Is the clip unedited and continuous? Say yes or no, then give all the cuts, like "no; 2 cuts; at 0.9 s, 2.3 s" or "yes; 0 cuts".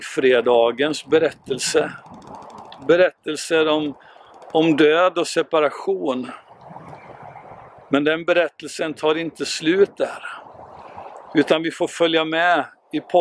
yes; 0 cuts